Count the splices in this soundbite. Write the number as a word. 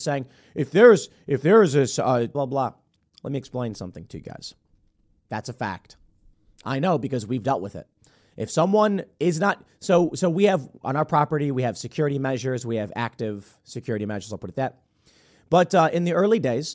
two